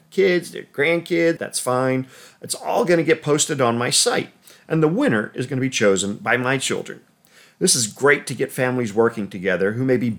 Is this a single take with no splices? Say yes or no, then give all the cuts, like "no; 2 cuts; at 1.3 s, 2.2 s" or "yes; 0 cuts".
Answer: no; 1 cut; at 1.4 s